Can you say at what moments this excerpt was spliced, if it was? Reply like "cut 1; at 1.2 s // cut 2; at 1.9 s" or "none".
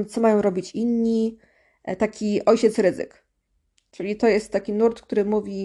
none